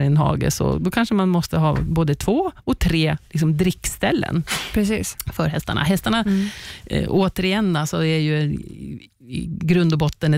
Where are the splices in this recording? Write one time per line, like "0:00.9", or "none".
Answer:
none

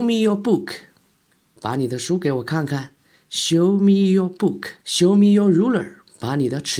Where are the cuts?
0:04.8

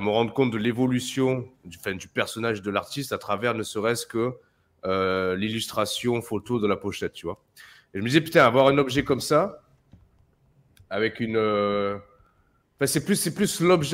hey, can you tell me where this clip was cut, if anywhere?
none

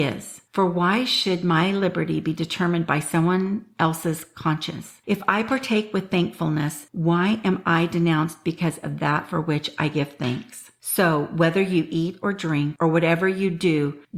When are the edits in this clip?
none

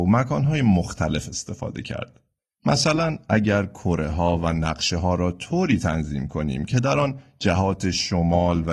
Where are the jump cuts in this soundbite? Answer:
0:02.6

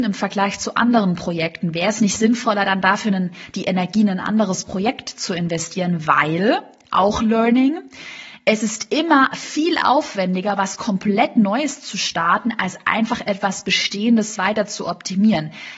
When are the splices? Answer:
none

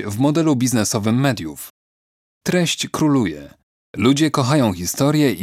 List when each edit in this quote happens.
0:03.8

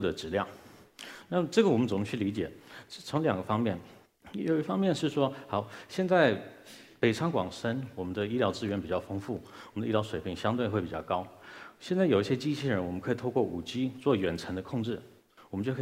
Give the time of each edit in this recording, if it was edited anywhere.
none

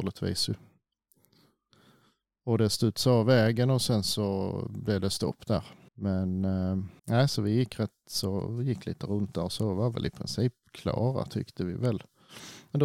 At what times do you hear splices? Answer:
0:05.9
0:07.0

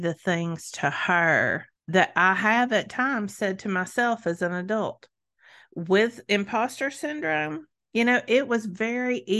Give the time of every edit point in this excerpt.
none

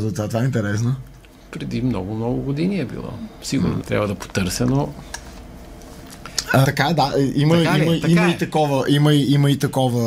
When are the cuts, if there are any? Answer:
0:03.8
0:06.6

